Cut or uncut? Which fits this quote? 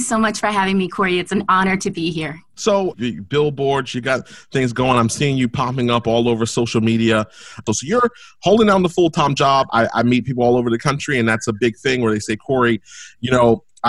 cut